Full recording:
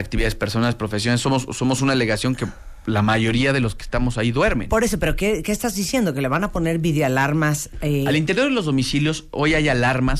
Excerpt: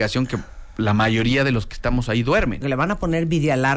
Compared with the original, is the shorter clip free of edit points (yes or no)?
no